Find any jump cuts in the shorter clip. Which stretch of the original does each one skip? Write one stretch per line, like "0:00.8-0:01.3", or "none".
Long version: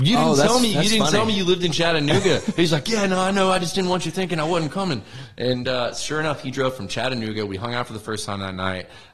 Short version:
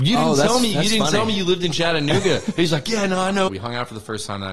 0:03.5-0:07.5